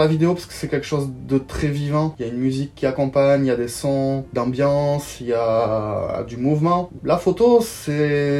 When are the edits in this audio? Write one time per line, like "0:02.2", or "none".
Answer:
0:07.0